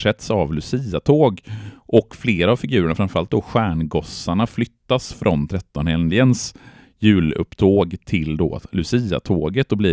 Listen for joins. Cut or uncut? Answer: uncut